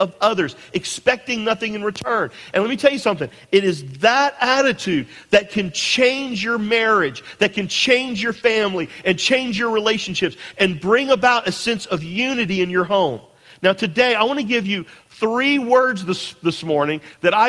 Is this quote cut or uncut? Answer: uncut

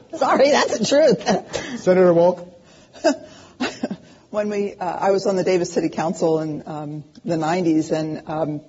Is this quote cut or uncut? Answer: uncut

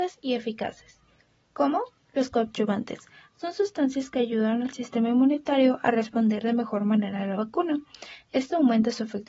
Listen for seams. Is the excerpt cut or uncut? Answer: uncut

